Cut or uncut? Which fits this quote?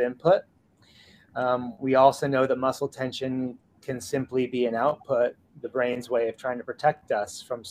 uncut